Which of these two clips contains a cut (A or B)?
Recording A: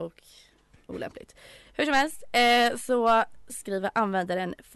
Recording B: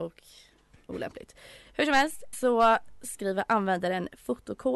B